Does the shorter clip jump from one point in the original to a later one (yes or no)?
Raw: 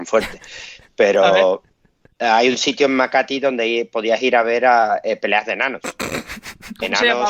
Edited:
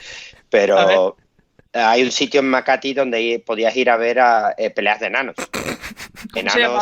no